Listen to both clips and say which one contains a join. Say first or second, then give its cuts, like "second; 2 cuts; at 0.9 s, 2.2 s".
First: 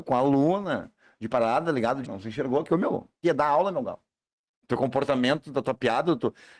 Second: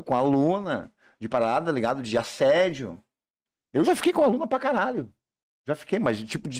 first; 2 cuts; at 2.0 s, 3.2 s